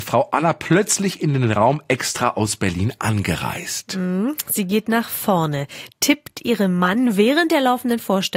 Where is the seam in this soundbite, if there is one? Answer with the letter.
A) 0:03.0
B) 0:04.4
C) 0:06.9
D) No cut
D